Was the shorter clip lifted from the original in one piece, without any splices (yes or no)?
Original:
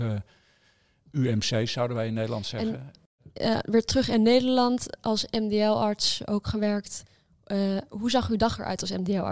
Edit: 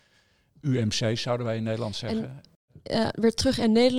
yes